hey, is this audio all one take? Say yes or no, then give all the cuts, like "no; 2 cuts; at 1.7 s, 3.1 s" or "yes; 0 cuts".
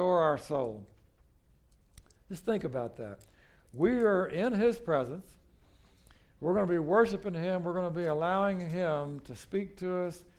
yes; 0 cuts